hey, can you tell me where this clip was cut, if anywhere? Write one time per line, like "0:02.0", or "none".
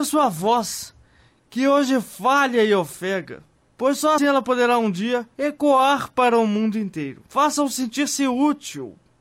0:04.2
0:05.3
0:07.3